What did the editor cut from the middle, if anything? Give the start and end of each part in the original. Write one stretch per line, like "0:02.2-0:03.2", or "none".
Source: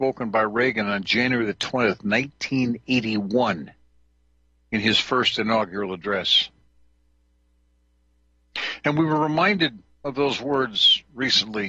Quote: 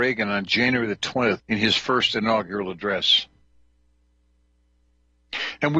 0:02.0-0:04.6